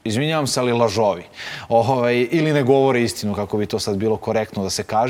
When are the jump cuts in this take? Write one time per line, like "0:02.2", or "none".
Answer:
none